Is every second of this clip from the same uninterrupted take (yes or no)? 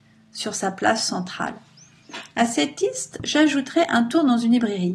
yes